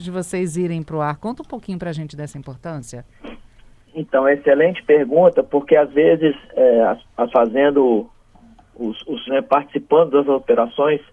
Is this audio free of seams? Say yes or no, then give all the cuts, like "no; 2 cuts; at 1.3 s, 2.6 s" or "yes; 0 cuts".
no; 2 cuts; at 7.3 s, 9.3 s